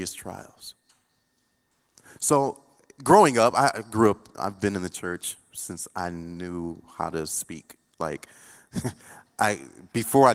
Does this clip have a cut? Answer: no; 0 cuts

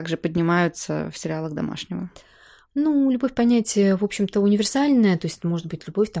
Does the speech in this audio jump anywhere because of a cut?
no; 0 cuts

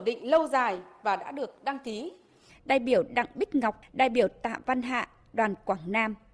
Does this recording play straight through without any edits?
no; 2 cuts; at 2.5 s, 3.8 s

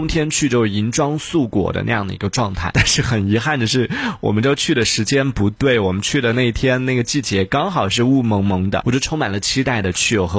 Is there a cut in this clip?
yes; 2 cuts; at 2.7 s, 8.8 s

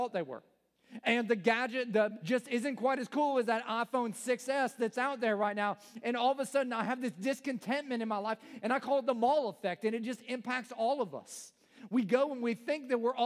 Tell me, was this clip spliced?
yes; 1 cut; at 2.2 s

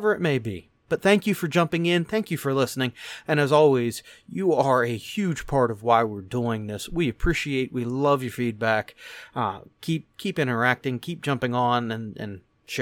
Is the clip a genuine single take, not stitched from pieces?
yes; 0 cuts

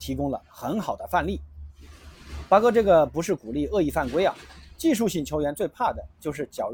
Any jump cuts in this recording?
no; 0 cuts

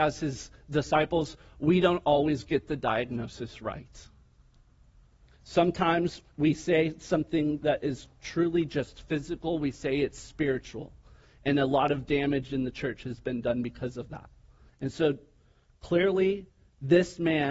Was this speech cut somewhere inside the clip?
yes; 1 cut; at 14.7 s

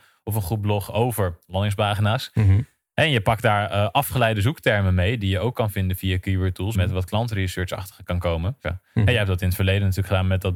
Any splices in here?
yes; 2 cuts; at 6.7 s, 8.6 s

